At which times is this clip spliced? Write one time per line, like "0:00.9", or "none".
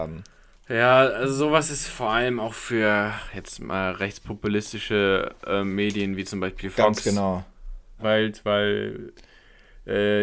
0:08.0